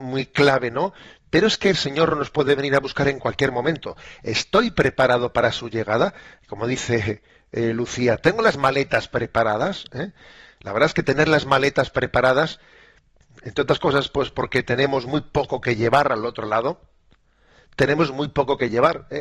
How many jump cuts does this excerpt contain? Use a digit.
0